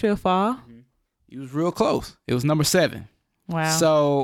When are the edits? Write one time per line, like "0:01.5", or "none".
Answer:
0:01.2